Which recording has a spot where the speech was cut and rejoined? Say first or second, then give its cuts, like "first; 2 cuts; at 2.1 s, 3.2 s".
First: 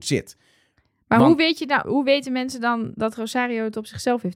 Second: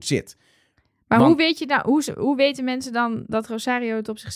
first; 1 cut; at 1.8 s